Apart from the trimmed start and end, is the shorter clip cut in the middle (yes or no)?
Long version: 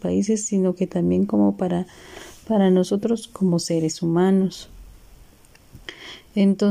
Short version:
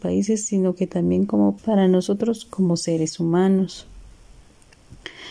yes